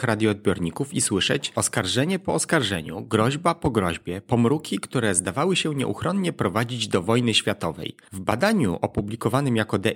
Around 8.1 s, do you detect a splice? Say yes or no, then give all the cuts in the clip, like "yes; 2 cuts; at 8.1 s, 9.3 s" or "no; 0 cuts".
no; 0 cuts